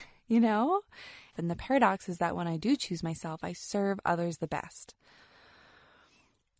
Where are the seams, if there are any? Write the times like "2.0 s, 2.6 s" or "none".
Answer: 1.3 s